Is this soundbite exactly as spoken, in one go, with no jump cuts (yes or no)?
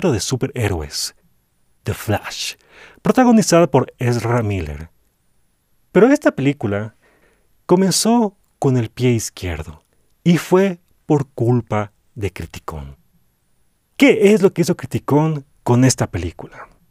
yes